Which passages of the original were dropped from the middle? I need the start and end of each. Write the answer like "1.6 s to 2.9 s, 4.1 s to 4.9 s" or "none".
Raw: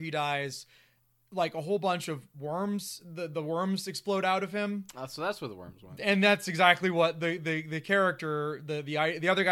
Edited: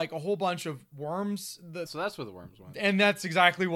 3.3 s to 5.1 s